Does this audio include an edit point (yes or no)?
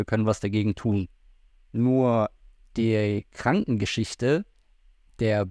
no